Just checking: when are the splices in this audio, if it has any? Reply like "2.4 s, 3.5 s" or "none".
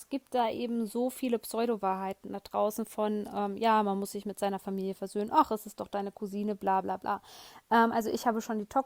none